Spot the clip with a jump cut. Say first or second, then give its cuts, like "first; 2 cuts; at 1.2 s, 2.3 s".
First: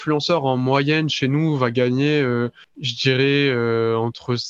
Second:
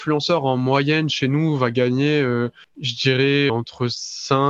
second; 1 cut; at 3.5 s